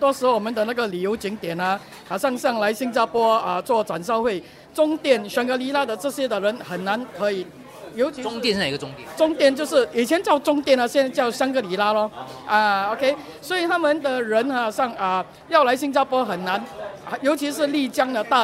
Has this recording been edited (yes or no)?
no